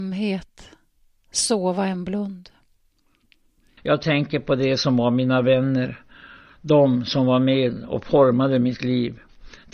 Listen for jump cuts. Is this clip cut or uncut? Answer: cut